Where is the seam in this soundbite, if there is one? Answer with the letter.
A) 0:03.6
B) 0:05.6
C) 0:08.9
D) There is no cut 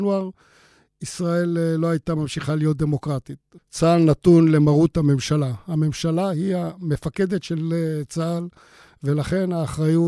A